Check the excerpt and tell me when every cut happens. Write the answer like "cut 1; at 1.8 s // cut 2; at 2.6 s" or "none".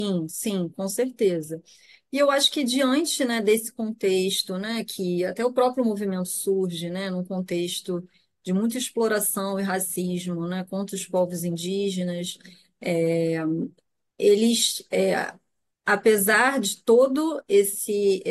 none